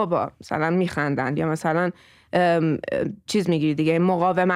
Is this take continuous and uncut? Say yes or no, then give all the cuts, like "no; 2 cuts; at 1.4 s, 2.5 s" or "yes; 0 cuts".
no; 1 cut; at 3.3 s